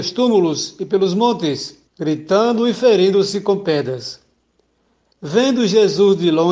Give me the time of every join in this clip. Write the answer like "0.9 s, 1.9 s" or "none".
1.9 s